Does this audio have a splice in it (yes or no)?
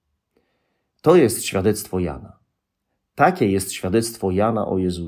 no